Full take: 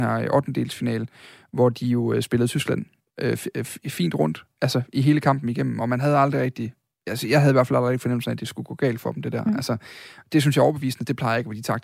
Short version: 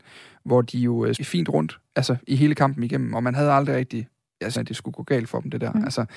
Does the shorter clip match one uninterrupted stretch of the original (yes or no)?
no